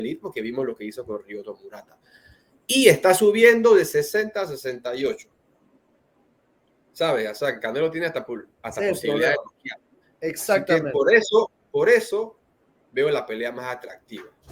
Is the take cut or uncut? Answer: uncut